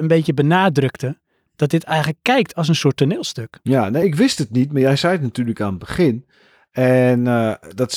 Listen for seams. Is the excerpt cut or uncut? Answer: uncut